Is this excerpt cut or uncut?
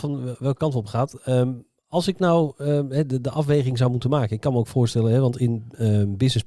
uncut